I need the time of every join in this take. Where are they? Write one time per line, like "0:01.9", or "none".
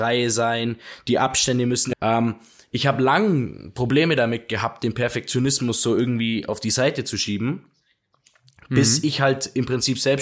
0:01.9